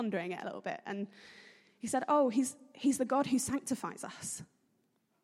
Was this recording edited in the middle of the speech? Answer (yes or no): no